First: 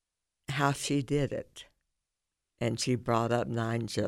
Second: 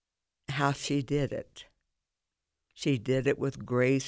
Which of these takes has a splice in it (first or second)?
first